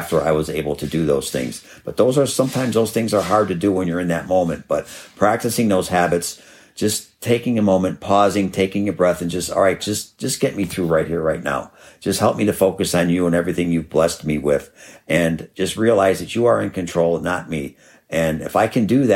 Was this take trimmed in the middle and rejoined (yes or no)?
yes